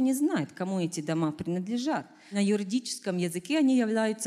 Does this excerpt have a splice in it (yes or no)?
no